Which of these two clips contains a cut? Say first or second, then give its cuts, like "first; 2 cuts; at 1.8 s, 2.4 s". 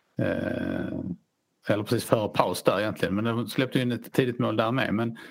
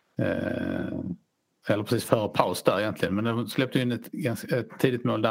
first; 1 cut; at 4.1 s